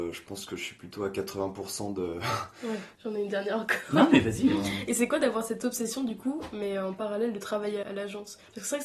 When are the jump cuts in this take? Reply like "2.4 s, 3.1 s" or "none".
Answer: 3.0 s, 7.8 s